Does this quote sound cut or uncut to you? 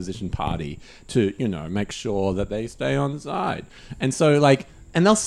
uncut